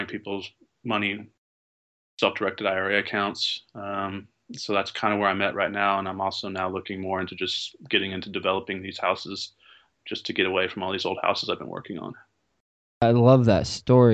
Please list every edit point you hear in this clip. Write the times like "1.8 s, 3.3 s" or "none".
none